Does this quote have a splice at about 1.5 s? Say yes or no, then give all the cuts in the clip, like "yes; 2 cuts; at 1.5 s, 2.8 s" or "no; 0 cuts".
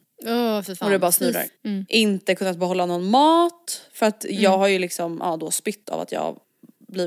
yes; 1 cut; at 1.5 s